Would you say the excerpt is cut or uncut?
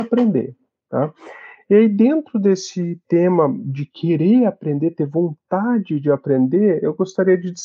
uncut